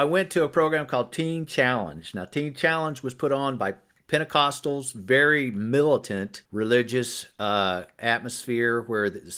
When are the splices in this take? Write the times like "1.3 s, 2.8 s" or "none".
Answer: 6.4 s